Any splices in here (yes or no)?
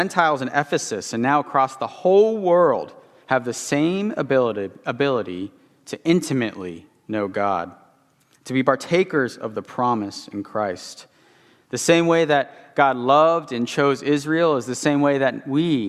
no